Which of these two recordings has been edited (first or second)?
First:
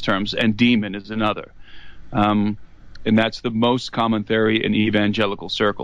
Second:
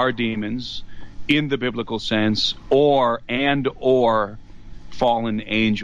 first